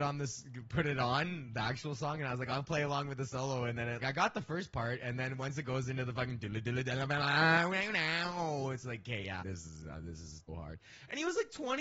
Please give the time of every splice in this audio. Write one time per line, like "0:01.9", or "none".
0:04.0
0:09.4
0:10.5

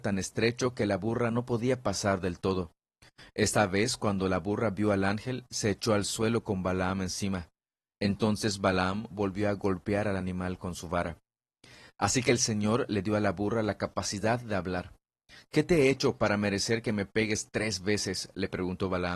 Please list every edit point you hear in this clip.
0:09.1

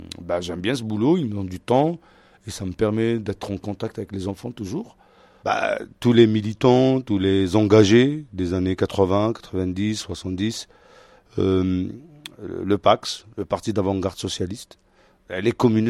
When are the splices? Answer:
0:05.4

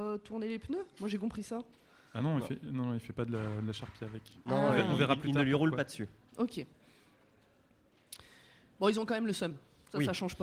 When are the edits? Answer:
none

